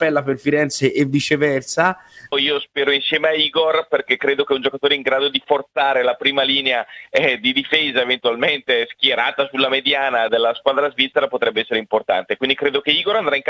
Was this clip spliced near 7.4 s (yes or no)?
no